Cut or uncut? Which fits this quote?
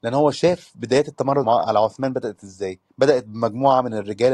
cut